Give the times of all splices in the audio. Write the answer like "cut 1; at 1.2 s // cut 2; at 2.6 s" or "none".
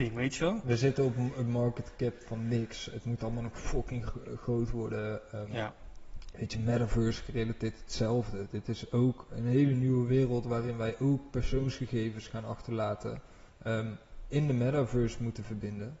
cut 1; at 9.3 s // cut 2; at 13.5 s